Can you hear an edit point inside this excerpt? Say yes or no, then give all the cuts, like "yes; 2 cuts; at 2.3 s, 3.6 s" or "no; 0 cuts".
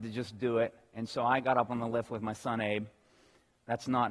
no; 0 cuts